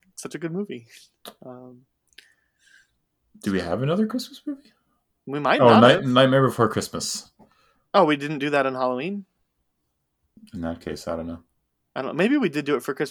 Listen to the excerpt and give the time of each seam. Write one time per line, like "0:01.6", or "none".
0:10.4